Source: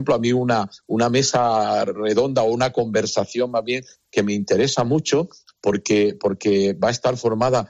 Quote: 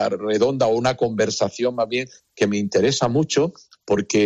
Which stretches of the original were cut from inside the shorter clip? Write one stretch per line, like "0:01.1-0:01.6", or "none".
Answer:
none